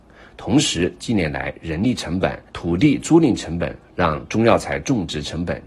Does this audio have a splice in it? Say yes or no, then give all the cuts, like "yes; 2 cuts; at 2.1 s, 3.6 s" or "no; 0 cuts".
yes; 2 cuts; at 2.5 s, 3.8 s